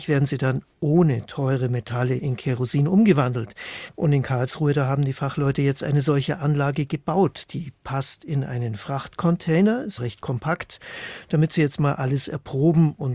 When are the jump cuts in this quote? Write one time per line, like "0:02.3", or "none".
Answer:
0:02.2
0:03.9
0:10.0